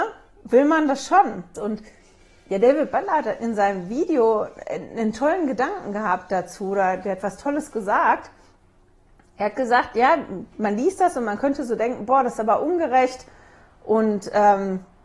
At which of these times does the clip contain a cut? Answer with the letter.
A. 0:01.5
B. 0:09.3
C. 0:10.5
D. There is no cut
A